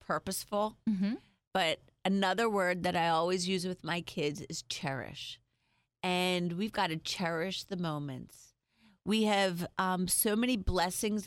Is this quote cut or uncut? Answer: uncut